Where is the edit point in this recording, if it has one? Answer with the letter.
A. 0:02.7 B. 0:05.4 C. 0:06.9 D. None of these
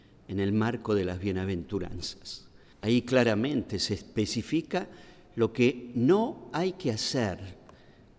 A